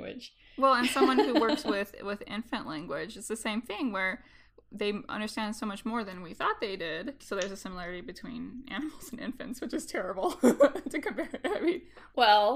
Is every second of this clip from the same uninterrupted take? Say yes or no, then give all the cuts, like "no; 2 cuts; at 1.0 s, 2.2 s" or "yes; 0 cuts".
yes; 0 cuts